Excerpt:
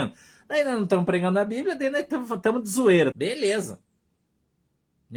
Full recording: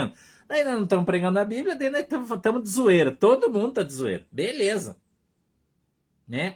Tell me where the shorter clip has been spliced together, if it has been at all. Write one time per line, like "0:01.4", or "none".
0:03.1